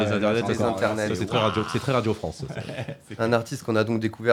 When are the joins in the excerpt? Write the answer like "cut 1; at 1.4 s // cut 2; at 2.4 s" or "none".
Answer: none